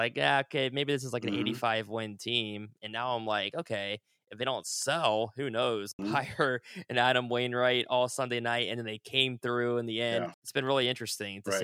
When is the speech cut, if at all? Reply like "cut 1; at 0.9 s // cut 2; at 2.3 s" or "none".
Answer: cut 1; at 6.0 s // cut 2; at 10.3 s